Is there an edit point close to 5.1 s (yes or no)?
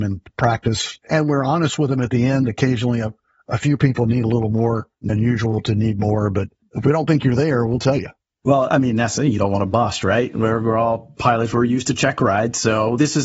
yes